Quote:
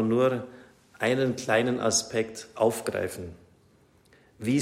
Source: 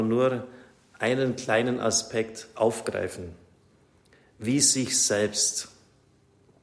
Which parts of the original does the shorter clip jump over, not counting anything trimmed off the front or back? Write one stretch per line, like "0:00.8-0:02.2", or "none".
none